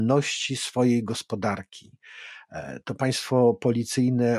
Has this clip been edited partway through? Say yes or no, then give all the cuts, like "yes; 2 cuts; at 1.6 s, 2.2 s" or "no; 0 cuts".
no; 0 cuts